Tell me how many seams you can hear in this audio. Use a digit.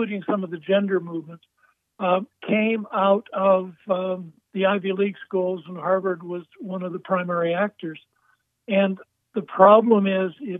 0